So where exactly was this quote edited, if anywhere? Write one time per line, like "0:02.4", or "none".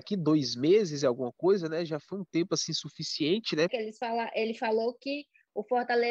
0:03.7